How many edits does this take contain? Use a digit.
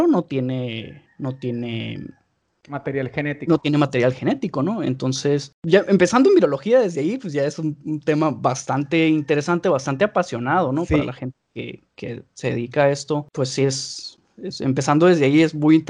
0